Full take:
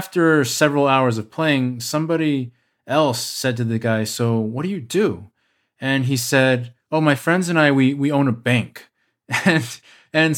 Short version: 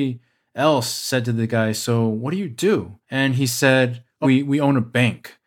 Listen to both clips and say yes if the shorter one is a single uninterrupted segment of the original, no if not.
no